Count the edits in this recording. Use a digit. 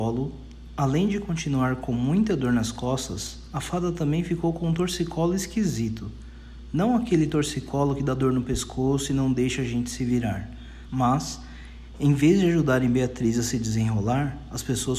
1